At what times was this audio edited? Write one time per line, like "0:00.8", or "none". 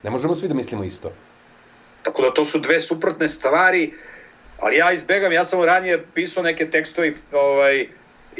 0:01.9